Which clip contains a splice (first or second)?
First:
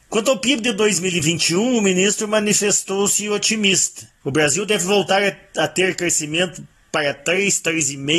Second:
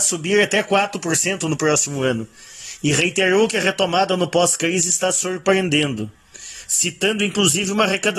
first